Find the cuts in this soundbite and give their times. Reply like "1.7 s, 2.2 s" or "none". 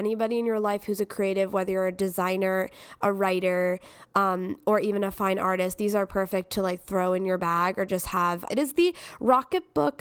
8.5 s